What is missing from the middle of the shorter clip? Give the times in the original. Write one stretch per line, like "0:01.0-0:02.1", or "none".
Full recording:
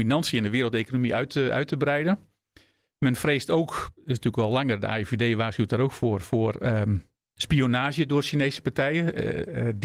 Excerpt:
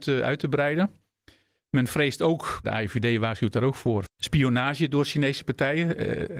0:03.9-0:04.8
0:06.2-0:07.2

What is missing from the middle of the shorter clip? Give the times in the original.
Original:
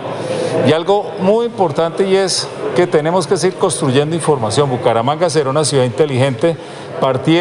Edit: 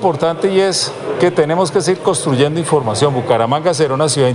none

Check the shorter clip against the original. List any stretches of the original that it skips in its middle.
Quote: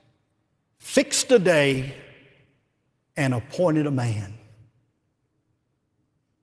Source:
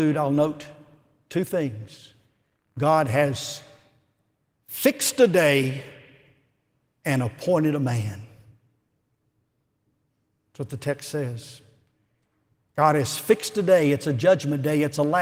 none

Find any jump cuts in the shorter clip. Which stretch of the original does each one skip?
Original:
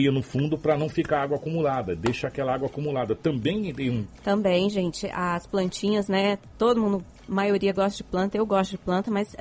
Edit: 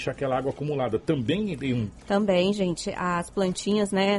none

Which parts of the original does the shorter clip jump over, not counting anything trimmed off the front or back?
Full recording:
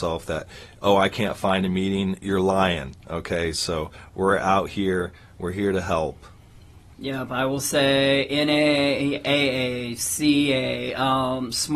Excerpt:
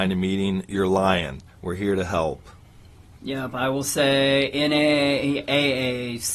0:03.0-0:05.2

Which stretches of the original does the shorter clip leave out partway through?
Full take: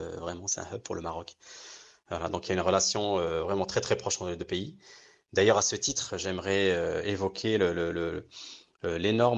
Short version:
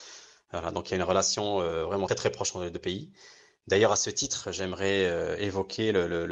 0:03.7-0:03.7

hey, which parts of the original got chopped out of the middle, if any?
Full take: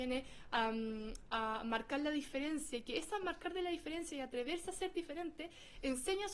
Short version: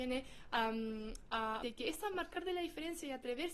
0:01.6-0:02.7

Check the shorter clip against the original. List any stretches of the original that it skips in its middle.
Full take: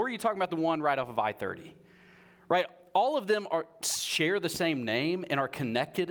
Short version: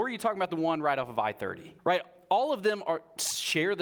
0:01.8-0:02.4

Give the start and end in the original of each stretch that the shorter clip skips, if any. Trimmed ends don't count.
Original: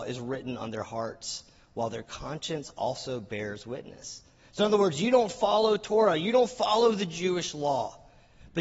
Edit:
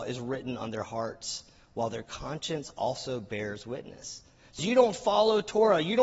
0:04.6-0:04.9

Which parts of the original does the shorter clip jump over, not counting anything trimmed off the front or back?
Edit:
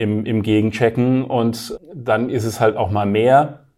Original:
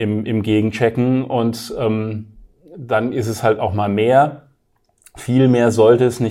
0:01.7-0:02.6

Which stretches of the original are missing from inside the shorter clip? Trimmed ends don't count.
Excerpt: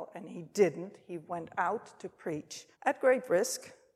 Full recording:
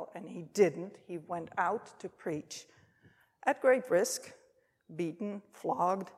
0:02.7-0:03.3

